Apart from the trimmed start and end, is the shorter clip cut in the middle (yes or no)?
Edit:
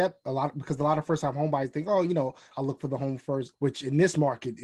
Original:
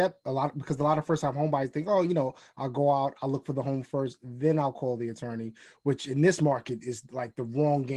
yes